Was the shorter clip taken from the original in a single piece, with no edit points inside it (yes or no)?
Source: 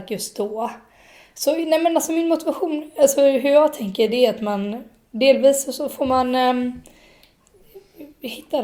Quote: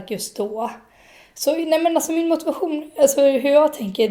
yes